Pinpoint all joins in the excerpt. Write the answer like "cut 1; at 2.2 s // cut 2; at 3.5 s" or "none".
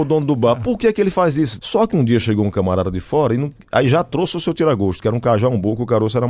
cut 1; at 1.6 s